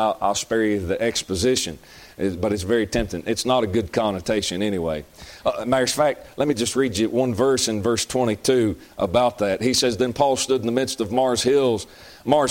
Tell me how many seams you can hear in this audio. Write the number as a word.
zero